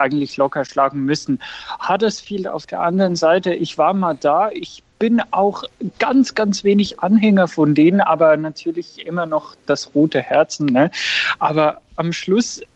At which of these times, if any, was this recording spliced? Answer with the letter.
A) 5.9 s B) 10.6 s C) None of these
B